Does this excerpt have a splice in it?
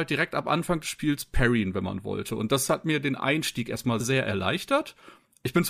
yes; 1 cut; at 4.0 s

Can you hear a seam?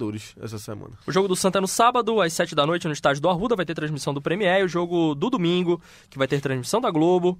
yes; 1 cut; at 1.0 s

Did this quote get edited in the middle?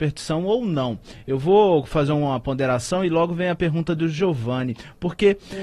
no; 0 cuts

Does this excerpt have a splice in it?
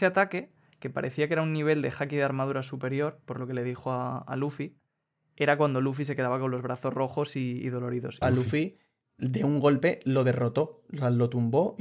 yes; 1 cut; at 8.2 s

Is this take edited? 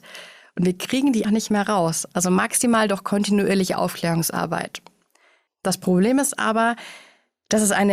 yes; 2 cuts; at 1.2 s, 5.5 s

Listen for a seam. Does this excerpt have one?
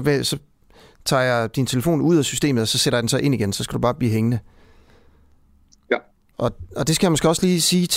yes; 1 cut; at 6.3 s

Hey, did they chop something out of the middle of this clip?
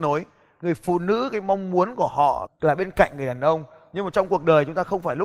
yes; 1 cut; at 2.5 s

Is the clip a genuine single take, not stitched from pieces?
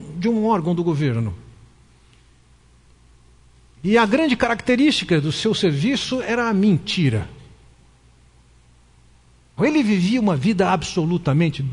no; 1 cut; at 9.6 s

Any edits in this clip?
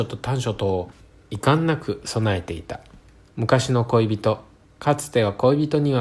yes; 2 cuts; at 3.3 s, 4.7 s

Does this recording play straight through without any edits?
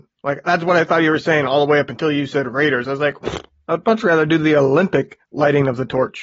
yes; 0 cuts

